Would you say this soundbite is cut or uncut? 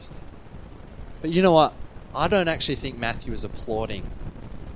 uncut